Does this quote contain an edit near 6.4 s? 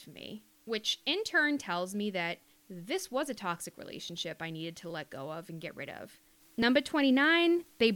yes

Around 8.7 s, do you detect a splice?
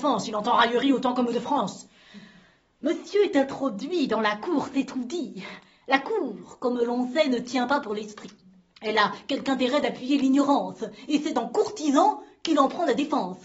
no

